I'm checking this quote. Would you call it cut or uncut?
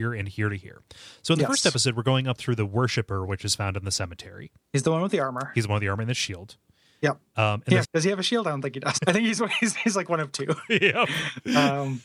cut